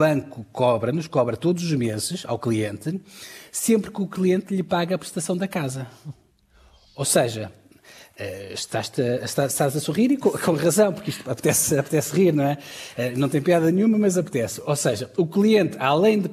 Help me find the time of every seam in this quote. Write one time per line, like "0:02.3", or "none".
none